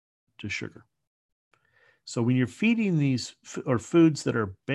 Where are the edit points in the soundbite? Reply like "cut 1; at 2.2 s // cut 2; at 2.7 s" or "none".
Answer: none